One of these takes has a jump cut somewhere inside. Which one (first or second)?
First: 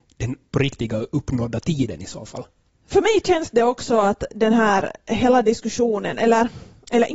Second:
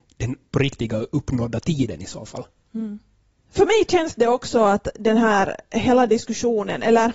first